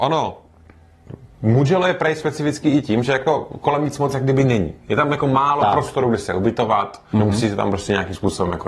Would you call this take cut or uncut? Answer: cut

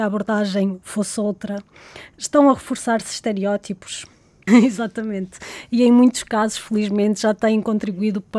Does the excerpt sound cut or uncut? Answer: cut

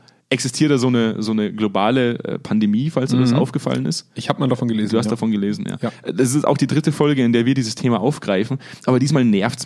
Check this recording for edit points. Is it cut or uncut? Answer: uncut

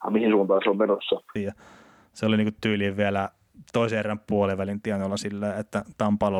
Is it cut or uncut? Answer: cut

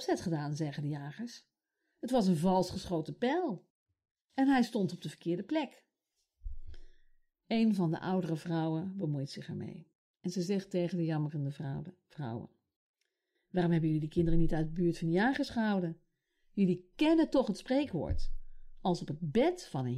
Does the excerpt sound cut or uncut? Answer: uncut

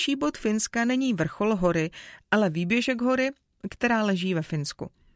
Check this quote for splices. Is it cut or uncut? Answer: uncut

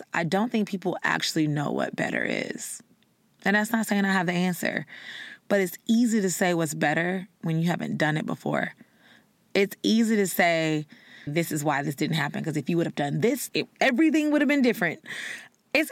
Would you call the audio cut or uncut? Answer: cut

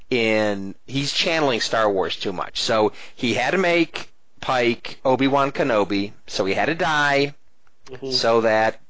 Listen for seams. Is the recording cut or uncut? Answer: uncut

